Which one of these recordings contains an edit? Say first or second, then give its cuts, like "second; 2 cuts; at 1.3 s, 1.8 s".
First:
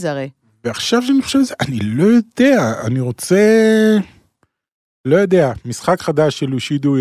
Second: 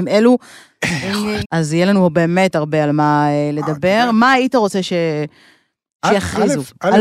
second; 1 cut; at 1.4 s